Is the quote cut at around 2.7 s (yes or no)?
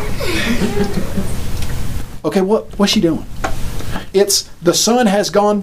yes